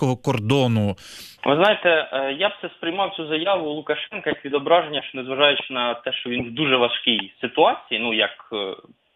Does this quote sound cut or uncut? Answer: cut